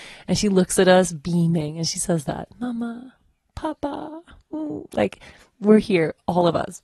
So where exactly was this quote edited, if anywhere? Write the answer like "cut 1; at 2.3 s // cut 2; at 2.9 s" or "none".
none